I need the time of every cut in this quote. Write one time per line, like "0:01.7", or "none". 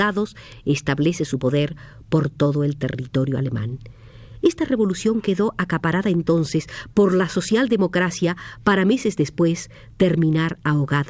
none